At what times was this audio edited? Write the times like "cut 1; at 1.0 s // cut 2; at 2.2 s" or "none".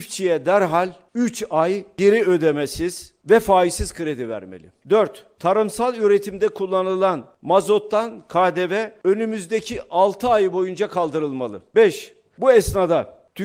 cut 1; at 4.8 s // cut 2; at 11.7 s